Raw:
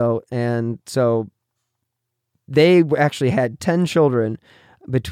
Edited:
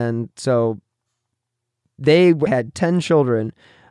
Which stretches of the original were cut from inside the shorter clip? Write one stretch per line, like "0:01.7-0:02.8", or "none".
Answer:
0:03.0-0:03.3